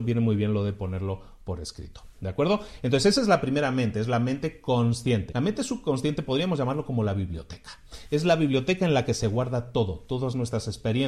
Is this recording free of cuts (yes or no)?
no